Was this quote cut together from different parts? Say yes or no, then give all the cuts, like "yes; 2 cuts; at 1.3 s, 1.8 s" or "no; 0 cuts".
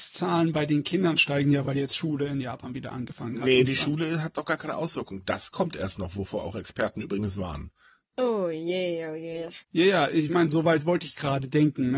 yes; 1 cut; at 9.6 s